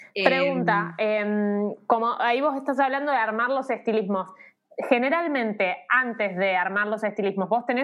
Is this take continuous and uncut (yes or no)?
yes